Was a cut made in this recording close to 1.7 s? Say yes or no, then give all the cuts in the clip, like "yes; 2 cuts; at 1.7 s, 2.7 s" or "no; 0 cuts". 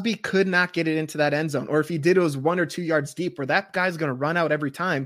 no; 0 cuts